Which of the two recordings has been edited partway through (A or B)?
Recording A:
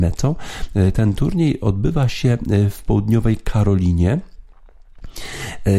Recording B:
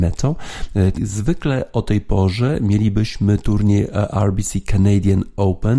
B